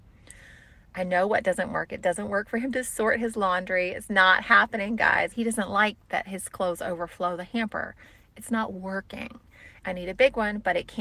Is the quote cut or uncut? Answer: cut